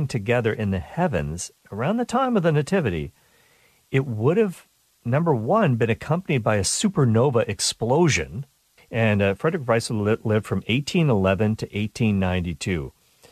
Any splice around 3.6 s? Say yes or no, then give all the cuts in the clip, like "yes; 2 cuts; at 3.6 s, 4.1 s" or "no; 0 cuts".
no; 1 cut; at 8.8 s